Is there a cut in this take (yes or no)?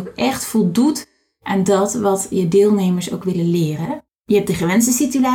yes